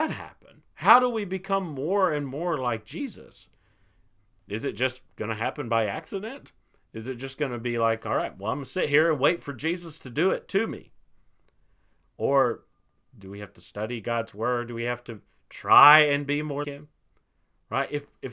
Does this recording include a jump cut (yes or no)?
yes